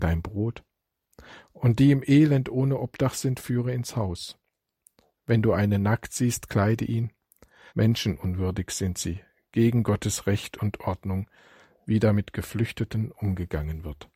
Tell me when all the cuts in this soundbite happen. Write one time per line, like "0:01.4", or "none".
0:07.7